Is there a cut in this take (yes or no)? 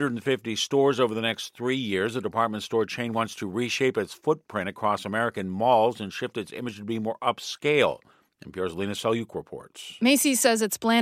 no